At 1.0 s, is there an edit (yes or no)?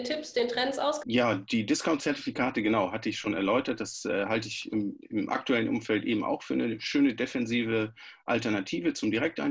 yes